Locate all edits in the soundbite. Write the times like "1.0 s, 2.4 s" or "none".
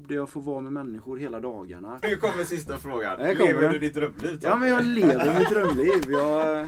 2.0 s